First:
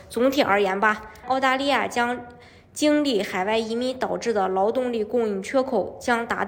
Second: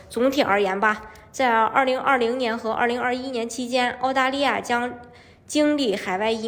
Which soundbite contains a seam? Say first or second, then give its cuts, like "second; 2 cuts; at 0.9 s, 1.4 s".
first; 1 cut; at 1.2 s